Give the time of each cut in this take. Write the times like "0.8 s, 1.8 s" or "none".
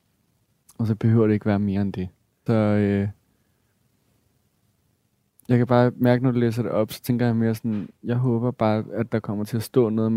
2.5 s